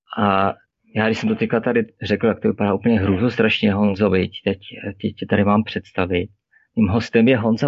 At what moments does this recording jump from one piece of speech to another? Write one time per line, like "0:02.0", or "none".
none